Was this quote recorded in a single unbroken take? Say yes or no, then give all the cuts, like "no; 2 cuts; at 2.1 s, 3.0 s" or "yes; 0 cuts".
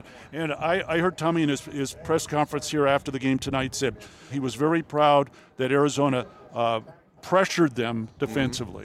no; 2 cuts; at 4.3 s, 7.2 s